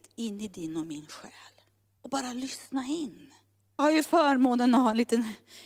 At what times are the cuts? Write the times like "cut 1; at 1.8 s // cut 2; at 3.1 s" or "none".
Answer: cut 1; at 2.0 s // cut 2; at 3.8 s